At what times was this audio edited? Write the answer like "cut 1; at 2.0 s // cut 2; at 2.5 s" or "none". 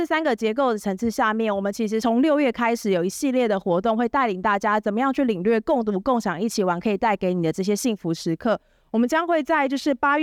none